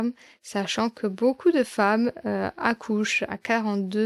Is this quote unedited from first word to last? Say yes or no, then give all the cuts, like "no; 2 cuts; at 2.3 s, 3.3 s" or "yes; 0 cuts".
yes; 0 cuts